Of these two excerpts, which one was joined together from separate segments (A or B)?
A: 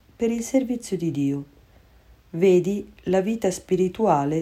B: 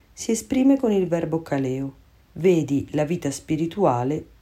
B